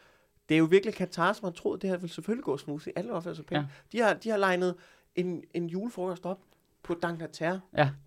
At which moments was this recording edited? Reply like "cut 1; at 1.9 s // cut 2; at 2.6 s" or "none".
none